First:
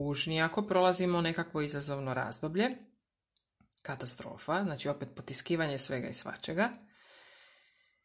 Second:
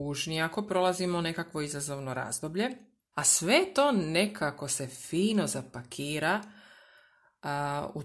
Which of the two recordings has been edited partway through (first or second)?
second